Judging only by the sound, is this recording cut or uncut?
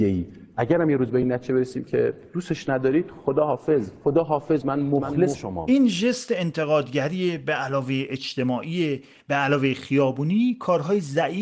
cut